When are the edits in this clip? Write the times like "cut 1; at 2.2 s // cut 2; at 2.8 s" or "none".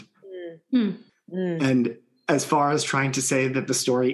cut 1; at 1.1 s